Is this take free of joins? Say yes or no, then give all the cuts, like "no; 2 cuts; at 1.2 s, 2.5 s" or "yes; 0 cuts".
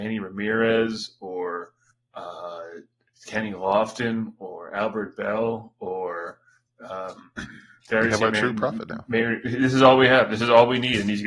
yes; 0 cuts